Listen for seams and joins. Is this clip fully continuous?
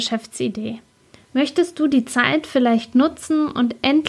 no; 1 cut; at 1.1 s

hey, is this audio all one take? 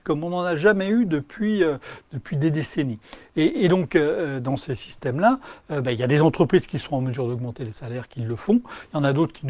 yes; 0 cuts

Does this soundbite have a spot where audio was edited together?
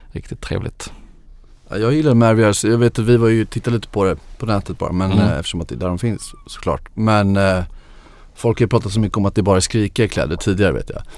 no; 0 cuts

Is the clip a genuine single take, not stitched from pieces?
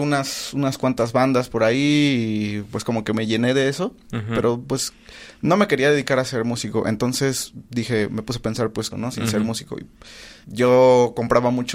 no; 2 cuts; at 8.9 s, 10.4 s

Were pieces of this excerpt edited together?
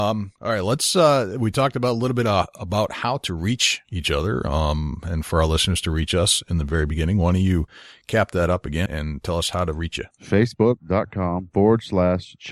yes; 1 cut; at 8.9 s

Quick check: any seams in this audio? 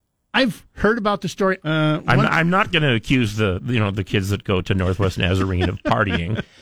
yes; 1 cut; at 1.6 s

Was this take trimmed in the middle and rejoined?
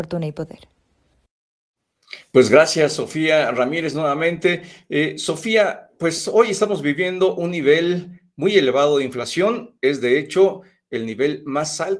no; 0 cuts

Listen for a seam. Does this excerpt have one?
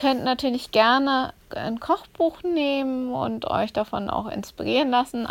no; 0 cuts

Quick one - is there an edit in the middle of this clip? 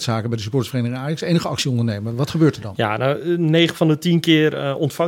no; 0 cuts

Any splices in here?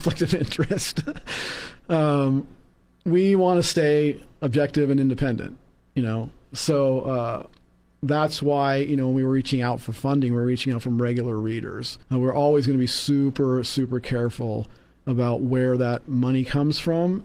yes; 1 cut; at 12.0 s

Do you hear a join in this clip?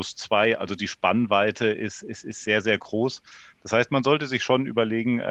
no; 0 cuts

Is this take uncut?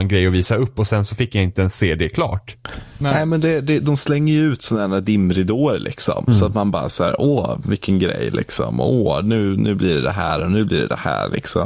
yes; 0 cuts

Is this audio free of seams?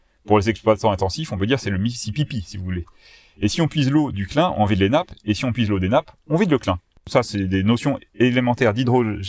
yes; 0 cuts

